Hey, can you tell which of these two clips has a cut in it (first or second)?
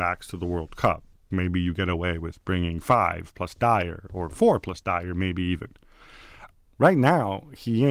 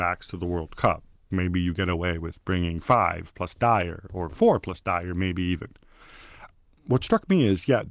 first